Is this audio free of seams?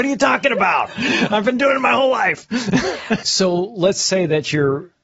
no; 1 cut; at 3.2 s

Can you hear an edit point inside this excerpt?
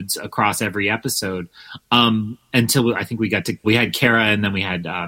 yes; 1 cut; at 3.6 s

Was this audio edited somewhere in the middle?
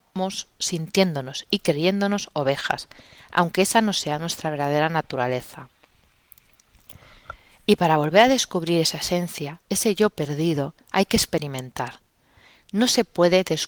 no; 0 cuts

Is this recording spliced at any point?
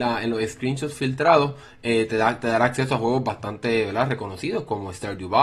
no; 0 cuts

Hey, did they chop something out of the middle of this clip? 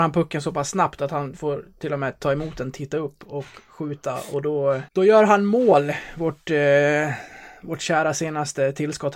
yes; 1 cut; at 4.9 s

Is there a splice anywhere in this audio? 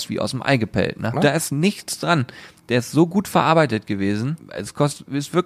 yes; 2 cuts; at 1.1 s, 4.4 s

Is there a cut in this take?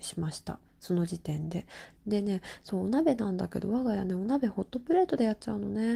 yes; 1 cut; at 2.0 s

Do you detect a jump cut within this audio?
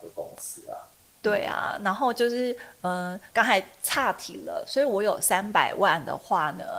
yes; 1 cut; at 3.3 s

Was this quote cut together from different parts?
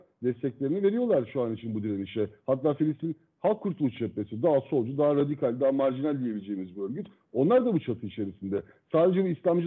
no; 0 cuts

